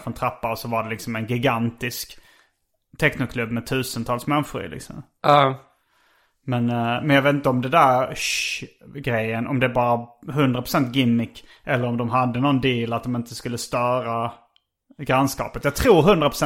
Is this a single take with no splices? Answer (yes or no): yes